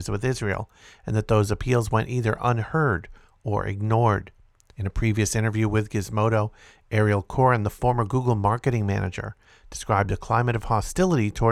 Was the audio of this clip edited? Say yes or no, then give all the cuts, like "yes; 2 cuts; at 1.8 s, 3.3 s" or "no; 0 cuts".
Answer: yes; 1 cut; at 4.7 s